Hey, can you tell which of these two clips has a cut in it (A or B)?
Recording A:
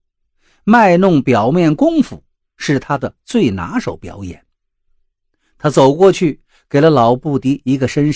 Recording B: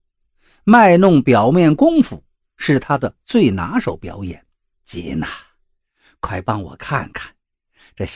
B